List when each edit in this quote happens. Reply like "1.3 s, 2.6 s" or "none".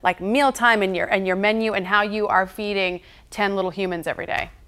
none